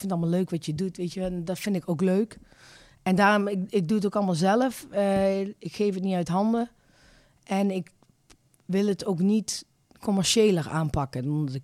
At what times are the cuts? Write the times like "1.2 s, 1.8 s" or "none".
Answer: none